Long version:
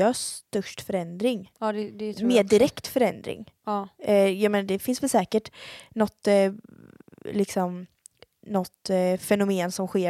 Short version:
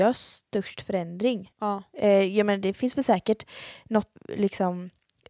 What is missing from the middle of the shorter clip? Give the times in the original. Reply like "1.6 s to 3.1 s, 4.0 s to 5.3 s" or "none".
1.5 s to 3.6 s, 6.2 s to 7.1 s